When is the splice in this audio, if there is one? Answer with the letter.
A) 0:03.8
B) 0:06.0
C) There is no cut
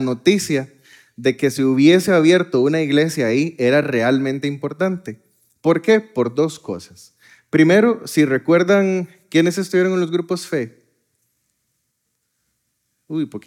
C